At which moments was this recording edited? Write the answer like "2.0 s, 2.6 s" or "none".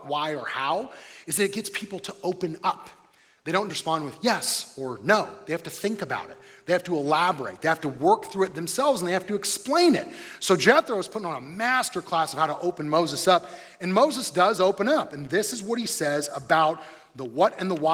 3.7 s

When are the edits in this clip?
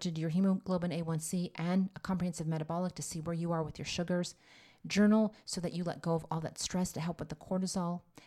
none

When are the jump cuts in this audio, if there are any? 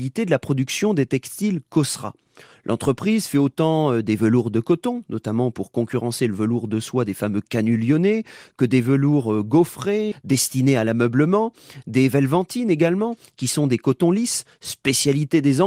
10.1 s

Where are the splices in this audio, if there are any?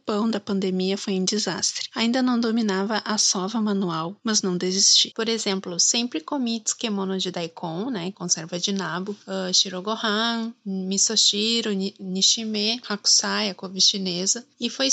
5.1 s

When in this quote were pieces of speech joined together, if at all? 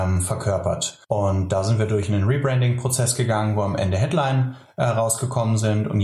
1.0 s

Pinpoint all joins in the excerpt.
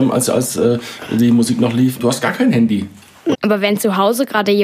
2.0 s, 3.3 s

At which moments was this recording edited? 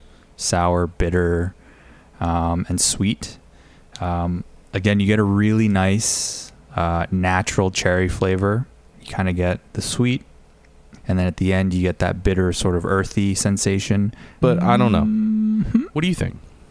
8.9 s, 11.0 s, 14.4 s

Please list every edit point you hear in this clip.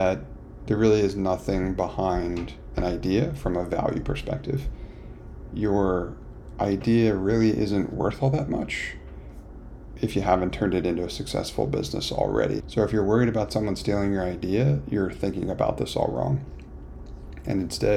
12.6 s

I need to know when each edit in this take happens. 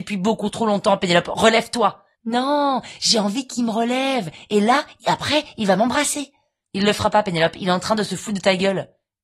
2.1 s

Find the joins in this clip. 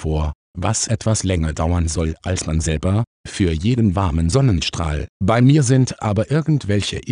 3.2 s, 5.1 s

